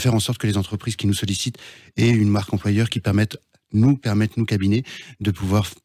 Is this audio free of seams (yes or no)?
yes